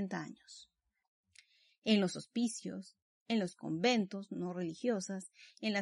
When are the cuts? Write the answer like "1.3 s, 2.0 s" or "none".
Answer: none